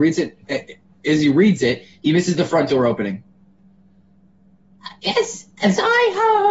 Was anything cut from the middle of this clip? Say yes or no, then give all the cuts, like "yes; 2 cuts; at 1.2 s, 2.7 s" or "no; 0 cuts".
no; 0 cuts